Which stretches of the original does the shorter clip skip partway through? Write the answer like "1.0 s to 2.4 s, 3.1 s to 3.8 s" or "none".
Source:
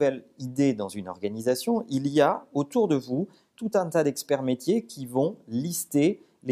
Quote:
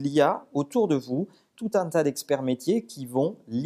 none